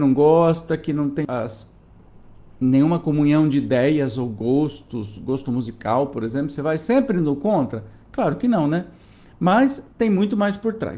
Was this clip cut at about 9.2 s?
no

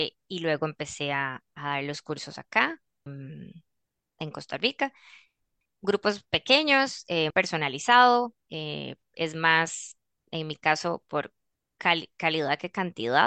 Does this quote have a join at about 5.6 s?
no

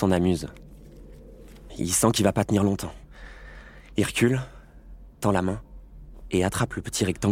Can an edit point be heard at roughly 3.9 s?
no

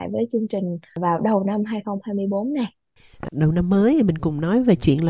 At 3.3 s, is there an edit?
yes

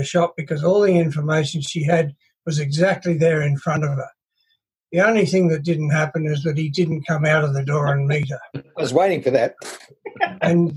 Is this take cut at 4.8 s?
no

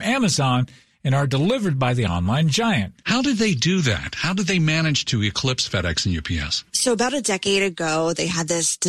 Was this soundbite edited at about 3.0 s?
yes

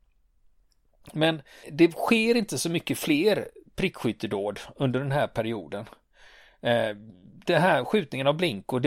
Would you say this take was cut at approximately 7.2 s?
no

